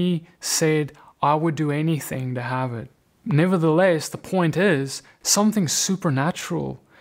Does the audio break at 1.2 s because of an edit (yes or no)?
no